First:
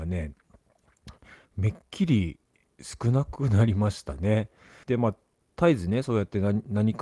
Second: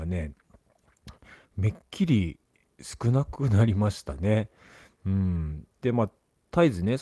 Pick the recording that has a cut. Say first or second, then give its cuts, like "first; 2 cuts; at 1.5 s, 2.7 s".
first; 1 cut; at 4.8 s